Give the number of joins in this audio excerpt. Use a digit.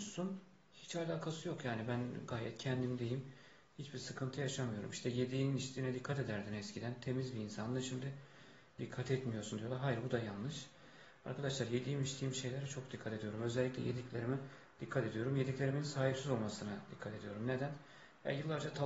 0